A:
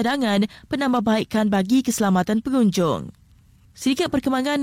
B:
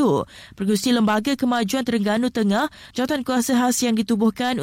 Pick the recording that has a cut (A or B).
B